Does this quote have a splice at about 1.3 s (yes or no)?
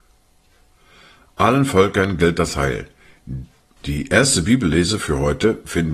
no